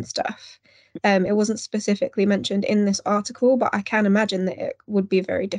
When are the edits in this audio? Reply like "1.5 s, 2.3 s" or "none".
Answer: none